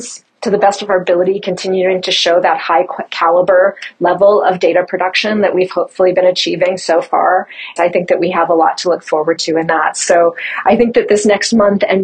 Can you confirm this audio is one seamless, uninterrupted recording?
no; 1 cut; at 7.8 s

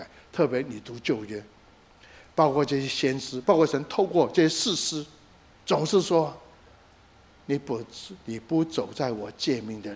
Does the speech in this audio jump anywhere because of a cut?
yes; 2 cuts; at 3.4 s, 5.5 s

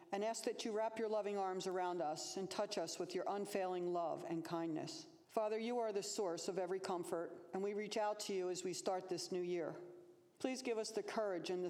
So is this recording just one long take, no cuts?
yes; 0 cuts

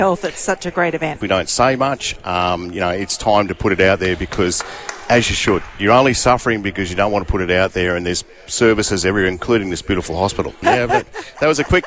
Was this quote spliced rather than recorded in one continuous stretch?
yes; 2 cuts; at 1.2 s, 10.6 s

